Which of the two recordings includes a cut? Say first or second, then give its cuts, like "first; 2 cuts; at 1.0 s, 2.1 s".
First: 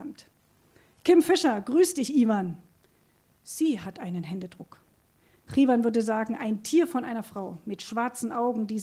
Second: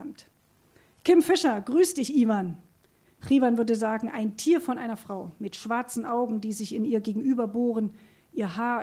second; 1 cut; at 3.0 s